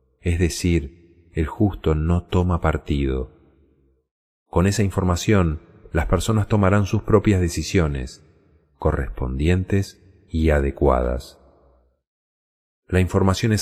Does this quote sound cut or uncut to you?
uncut